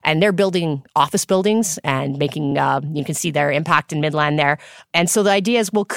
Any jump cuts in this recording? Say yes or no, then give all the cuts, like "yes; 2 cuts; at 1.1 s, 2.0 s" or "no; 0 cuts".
no; 0 cuts